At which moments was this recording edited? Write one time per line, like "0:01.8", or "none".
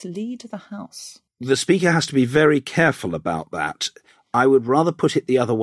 0:01.3